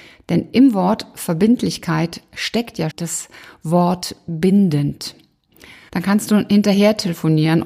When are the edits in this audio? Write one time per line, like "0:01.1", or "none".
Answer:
0:02.9
0:05.9